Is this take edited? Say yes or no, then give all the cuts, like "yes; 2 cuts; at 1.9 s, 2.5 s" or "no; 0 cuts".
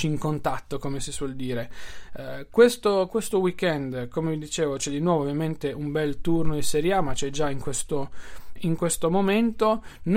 yes; 1 cut; at 8.6 s